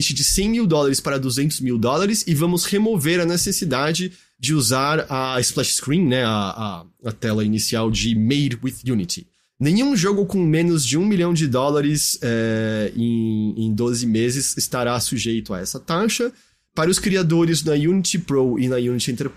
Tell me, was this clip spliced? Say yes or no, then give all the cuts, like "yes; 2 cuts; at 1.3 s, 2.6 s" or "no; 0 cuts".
no; 0 cuts